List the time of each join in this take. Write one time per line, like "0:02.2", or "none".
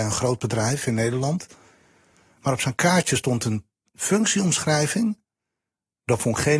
none